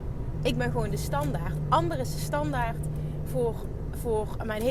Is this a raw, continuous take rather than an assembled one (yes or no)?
yes